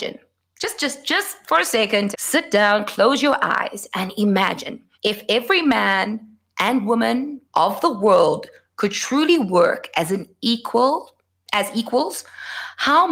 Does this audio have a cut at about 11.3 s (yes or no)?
no